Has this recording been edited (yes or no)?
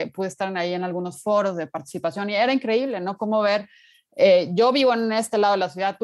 no